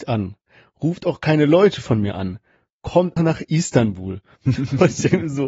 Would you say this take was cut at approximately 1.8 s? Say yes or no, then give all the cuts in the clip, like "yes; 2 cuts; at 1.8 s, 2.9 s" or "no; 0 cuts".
no; 2 cuts; at 3.2 s, 4.6 s